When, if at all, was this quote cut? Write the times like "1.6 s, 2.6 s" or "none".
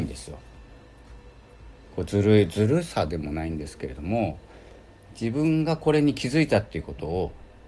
1.8 s